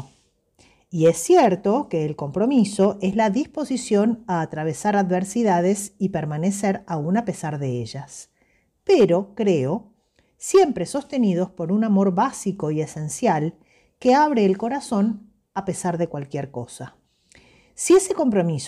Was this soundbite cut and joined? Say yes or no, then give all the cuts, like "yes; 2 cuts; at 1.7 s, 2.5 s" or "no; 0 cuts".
no; 0 cuts